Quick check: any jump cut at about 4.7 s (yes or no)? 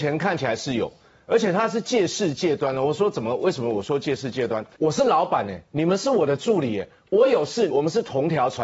yes